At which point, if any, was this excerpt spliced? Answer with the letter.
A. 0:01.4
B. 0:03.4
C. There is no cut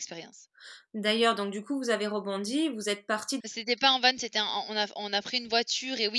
B